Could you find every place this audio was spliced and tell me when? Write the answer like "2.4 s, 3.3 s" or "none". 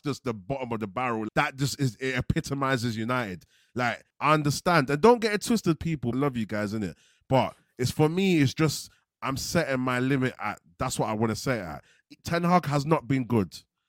1.3 s, 4.1 s, 6.1 s